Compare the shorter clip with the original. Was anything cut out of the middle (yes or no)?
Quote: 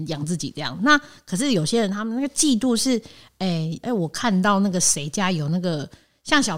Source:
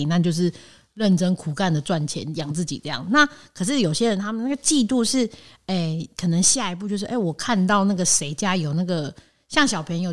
yes